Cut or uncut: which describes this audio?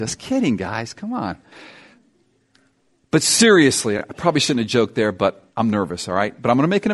uncut